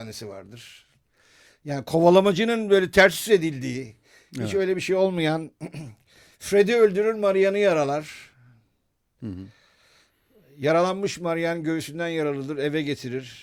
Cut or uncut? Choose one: uncut